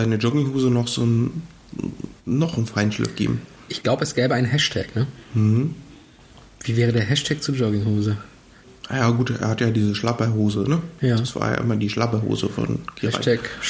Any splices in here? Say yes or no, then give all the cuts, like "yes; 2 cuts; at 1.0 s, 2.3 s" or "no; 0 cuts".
no; 0 cuts